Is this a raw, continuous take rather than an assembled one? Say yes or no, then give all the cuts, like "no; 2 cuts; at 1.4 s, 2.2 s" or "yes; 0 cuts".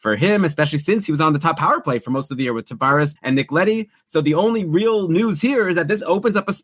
no; 1 cut; at 3.2 s